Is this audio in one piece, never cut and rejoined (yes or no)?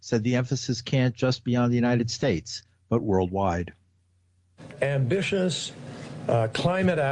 yes